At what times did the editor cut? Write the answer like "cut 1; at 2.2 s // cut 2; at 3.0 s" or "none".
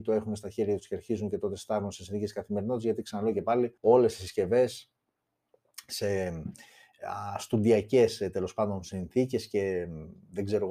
cut 1; at 3.8 s